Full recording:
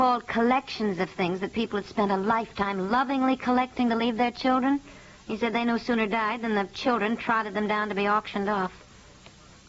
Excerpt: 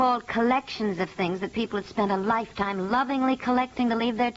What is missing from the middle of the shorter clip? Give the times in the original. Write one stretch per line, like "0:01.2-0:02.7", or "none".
none